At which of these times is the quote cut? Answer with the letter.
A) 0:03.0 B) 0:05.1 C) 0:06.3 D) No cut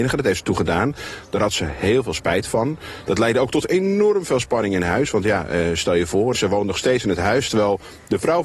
C